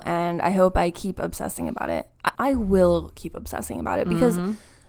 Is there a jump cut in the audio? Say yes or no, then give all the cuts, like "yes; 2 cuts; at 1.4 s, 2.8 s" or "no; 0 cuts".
yes; 1 cut; at 2.3 s